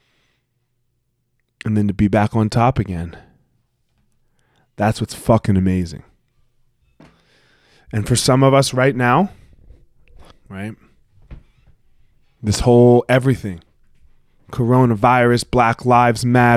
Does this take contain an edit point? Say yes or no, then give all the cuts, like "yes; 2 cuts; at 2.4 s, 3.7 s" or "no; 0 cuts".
yes; 1 cut; at 10.3 s